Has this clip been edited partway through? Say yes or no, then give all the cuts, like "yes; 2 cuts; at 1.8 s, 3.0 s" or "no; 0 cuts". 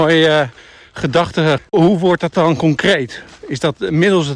yes; 1 cut; at 1.6 s